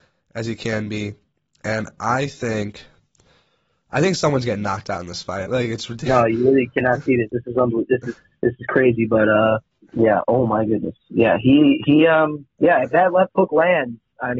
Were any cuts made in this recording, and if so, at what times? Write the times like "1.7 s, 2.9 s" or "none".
5.4 s